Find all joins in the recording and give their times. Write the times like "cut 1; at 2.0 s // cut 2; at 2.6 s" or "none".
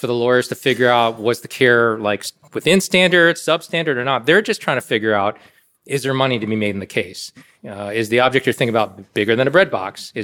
cut 1; at 7.6 s